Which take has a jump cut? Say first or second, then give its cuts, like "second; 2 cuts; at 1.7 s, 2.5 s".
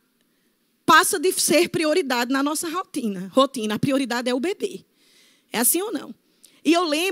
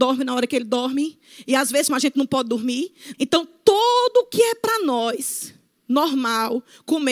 second; 2 cuts; at 1.9 s, 3.1 s